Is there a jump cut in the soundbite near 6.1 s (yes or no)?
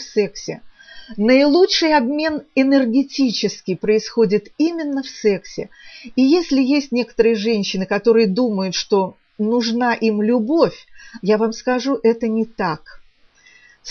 no